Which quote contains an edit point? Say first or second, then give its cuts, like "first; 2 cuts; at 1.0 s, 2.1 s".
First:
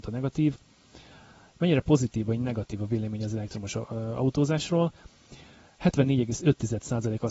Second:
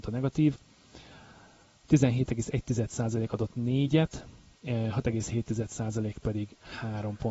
first; 1 cut; at 1.5 s